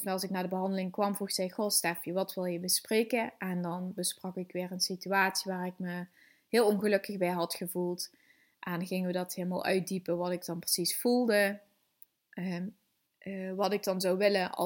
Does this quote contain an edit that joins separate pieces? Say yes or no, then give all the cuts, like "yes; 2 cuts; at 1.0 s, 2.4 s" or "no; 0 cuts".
yes; 1 cut; at 13.1 s